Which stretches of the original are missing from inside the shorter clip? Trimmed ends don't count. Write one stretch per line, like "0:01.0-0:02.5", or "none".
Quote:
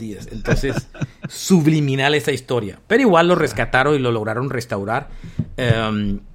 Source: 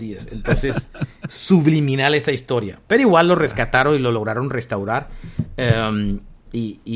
none